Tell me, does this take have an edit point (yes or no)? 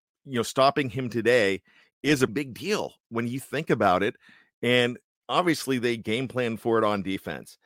yes